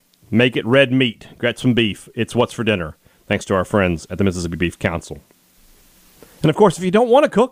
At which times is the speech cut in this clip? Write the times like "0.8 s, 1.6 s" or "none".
none